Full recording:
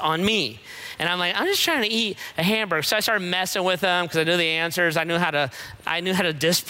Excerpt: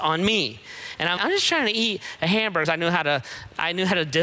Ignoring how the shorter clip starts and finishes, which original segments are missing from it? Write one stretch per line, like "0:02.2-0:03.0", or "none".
0:01.2-0:01.3
0:02.8-0:04.9